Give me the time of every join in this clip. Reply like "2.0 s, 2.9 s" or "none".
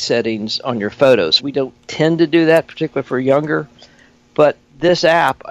1.4 s